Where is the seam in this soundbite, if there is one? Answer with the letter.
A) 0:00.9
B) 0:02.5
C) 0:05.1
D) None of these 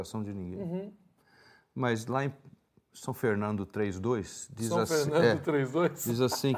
D